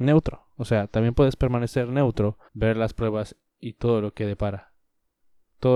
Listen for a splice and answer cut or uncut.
cut